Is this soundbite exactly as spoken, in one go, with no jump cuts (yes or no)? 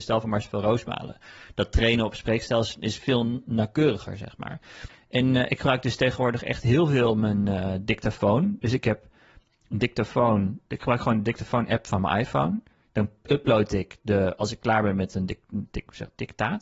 yes